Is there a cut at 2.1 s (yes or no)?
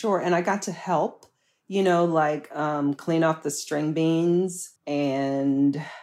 no